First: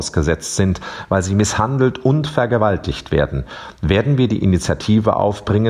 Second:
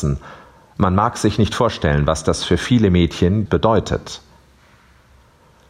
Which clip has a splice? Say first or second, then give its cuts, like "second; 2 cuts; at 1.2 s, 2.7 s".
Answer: second; 1 cut; at 3.5 s